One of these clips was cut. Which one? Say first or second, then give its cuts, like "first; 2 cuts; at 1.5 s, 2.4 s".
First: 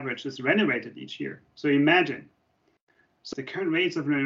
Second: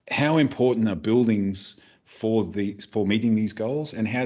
first; 1 cut; at 3.3 s